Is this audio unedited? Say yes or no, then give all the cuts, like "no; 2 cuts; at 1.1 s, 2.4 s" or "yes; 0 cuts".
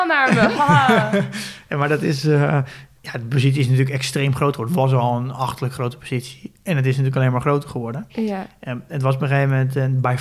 no; 1 cut; at 3.0 s